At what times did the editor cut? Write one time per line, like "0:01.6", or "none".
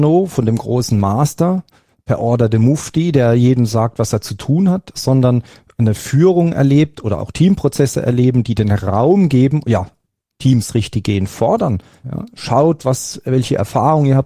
0:12.0